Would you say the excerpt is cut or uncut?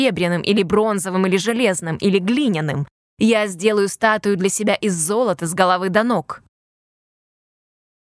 uncut